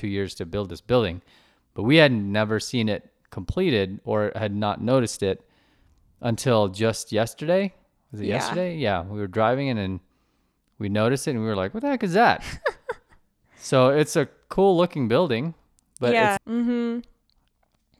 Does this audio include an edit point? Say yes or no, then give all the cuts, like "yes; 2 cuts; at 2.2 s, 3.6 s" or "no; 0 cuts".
yes; 1 cut; at 16.4 s